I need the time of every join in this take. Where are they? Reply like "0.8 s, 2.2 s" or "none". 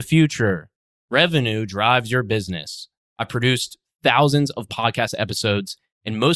0.9 s, 3.1 s